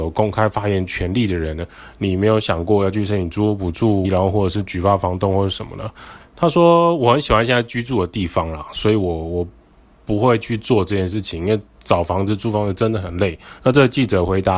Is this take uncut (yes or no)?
no